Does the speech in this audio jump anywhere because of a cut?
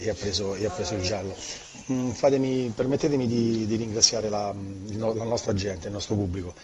no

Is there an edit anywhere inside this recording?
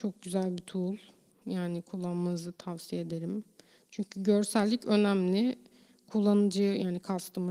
no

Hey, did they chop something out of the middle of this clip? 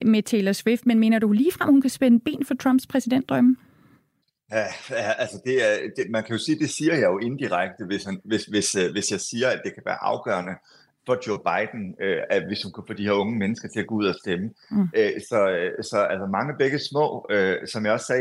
no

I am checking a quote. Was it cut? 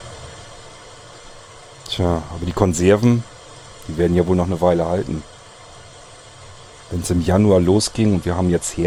no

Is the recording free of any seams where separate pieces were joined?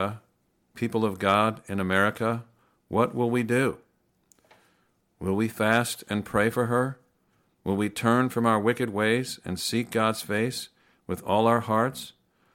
yes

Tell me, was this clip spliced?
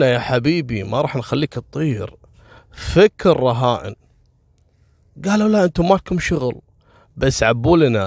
no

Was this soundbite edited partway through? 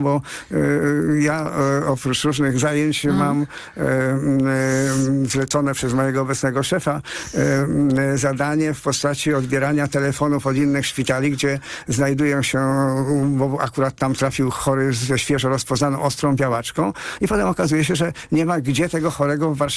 no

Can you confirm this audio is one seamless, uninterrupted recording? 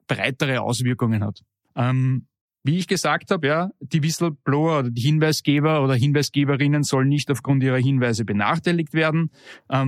no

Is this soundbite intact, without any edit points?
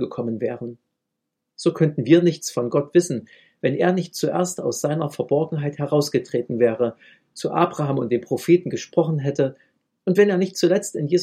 yes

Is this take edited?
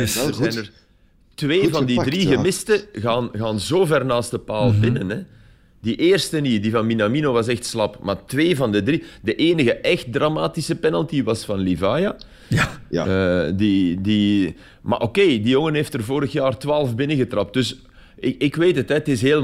no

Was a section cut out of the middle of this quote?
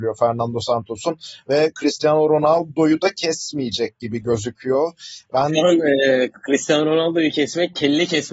no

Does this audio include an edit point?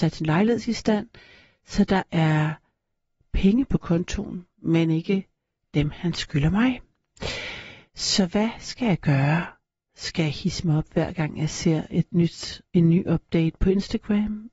no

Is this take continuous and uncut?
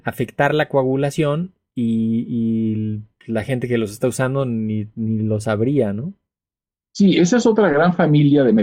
yes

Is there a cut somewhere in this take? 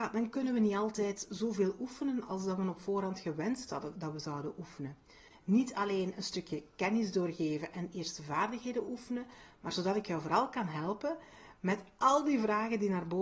yes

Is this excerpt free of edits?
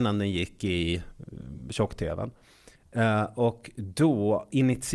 yes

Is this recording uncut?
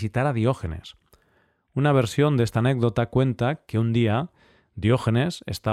yes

